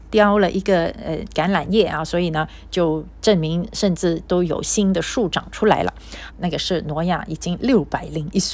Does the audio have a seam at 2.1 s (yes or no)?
no